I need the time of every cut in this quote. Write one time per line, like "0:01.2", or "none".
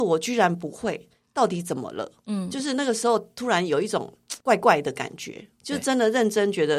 0:04.4